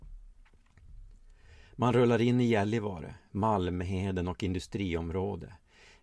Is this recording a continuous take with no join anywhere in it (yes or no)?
yes